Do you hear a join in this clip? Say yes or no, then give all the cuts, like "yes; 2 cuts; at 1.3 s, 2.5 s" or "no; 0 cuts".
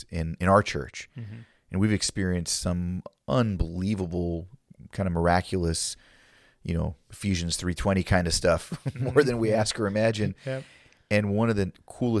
no; 0 cuts